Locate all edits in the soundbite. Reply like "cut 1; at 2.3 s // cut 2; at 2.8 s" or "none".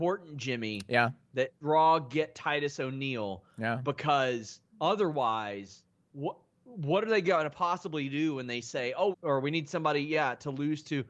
cut 1; at 4.7 s // cut 2; at 9.1 s